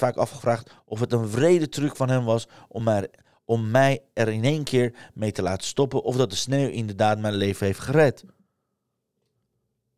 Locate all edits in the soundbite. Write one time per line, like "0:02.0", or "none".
none